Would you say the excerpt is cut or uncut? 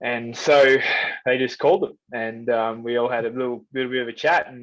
uncut